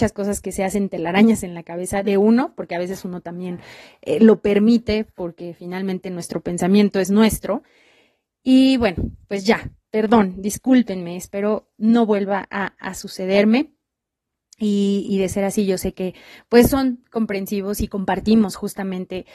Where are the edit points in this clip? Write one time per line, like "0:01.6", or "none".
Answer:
none